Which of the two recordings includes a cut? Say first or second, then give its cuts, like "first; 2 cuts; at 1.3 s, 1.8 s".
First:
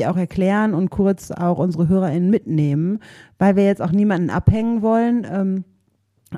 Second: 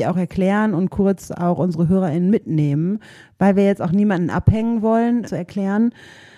second; 1 cut; at 5.3 s